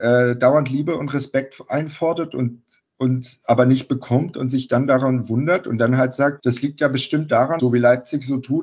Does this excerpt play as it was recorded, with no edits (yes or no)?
no